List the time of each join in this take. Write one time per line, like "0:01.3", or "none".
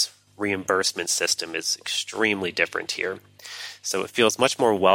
none